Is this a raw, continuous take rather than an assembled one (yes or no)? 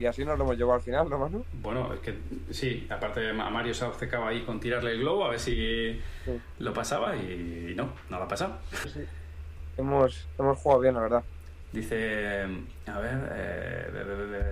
no